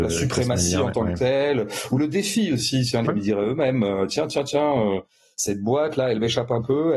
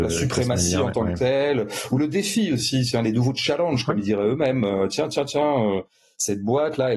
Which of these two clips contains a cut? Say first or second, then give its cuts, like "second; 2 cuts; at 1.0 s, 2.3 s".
first; 1 cut; at 3.0 s